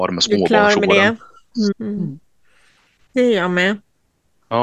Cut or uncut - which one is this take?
cut